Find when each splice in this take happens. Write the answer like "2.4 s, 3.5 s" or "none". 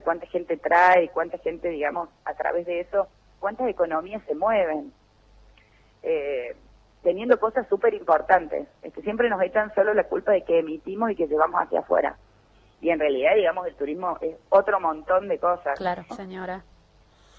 16.1 s